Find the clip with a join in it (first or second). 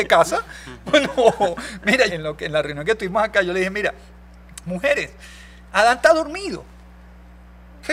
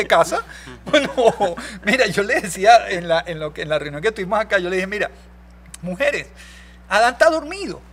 first